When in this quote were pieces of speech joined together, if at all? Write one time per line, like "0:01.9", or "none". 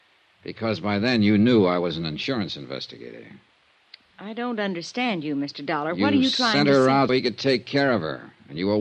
0:07.1